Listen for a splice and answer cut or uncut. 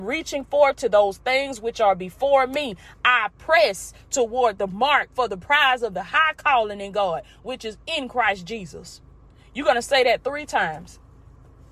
uncut